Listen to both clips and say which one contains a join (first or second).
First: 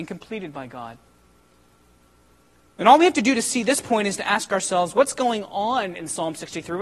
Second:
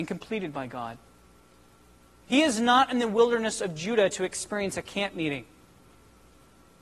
second